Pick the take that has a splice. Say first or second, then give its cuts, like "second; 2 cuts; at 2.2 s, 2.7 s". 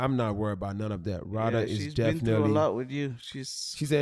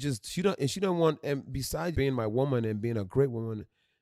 second; 1 cut; at 1.9 s